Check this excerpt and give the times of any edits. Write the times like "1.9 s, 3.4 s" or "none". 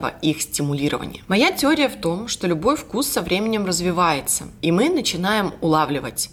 1.3 s